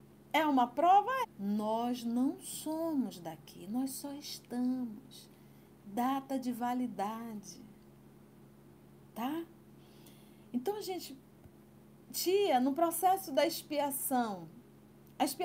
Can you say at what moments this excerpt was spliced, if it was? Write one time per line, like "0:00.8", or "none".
0:01.2
0:10.5